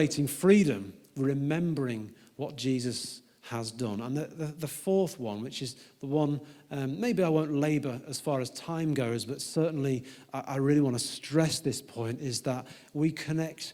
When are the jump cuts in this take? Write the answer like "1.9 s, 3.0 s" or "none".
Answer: none

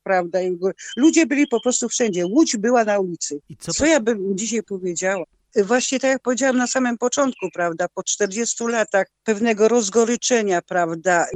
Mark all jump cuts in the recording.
3.4 s, 5.5 s, 9.2 s

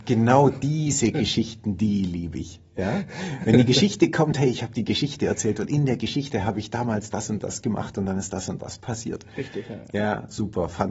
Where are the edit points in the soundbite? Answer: none

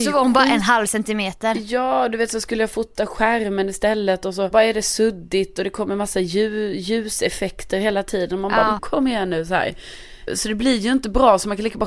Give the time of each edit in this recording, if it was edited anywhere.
8.8 s, 10.3 s

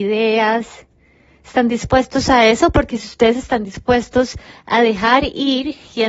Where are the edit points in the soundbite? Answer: none

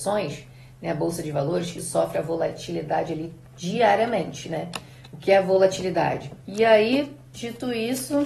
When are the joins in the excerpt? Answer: 6.4 s

